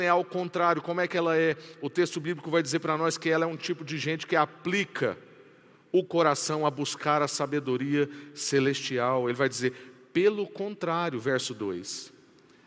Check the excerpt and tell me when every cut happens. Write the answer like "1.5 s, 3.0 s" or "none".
none

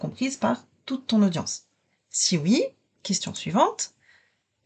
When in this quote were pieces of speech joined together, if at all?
none

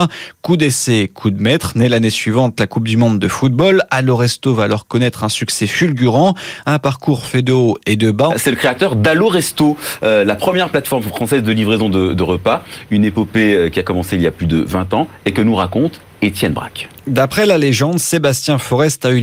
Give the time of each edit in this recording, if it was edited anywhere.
8.3 s

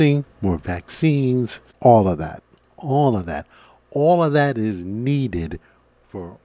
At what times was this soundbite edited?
2.6 s

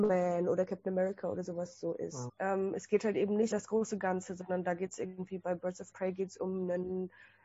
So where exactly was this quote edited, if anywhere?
2.3 s, 3.5 s

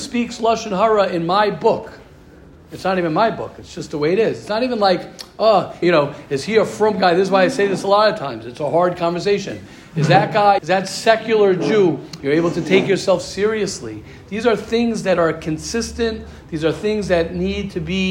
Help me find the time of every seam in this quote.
5.8 s, 10.6 s, 12.2 s

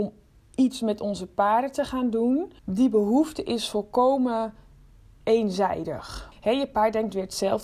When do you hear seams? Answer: 2.6 s, 6.3 s

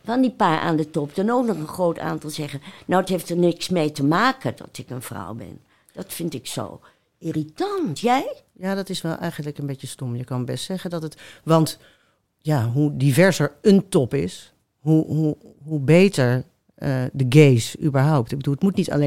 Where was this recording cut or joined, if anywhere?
none

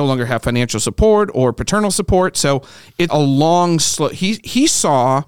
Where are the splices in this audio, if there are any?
3.1 s

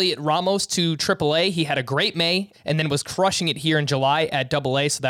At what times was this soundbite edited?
2.5 s

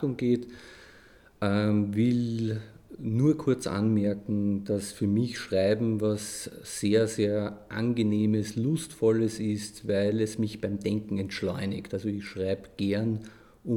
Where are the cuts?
none

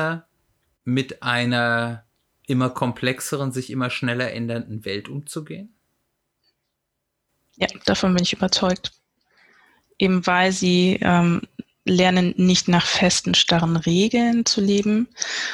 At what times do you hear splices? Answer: none

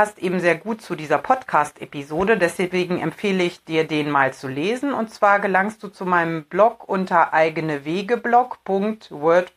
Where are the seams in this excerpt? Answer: none

